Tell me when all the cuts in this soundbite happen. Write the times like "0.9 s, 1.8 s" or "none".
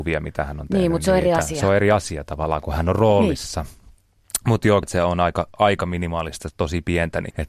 4.8 s